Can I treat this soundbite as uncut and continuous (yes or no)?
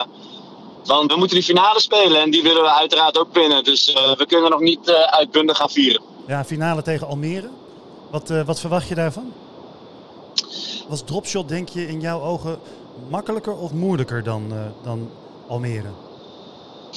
no